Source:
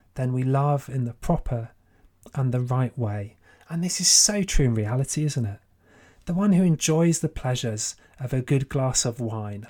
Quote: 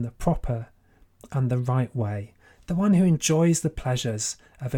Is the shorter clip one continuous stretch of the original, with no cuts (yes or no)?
no